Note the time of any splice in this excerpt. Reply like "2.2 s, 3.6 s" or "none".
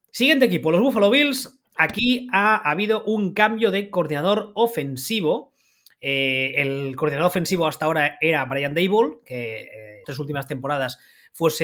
10.0 s